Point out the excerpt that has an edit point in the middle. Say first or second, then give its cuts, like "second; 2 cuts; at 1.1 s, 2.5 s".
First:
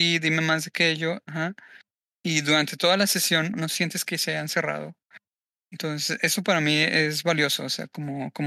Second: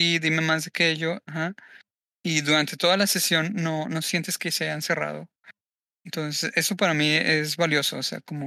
first; 1 cut; at 3.5 s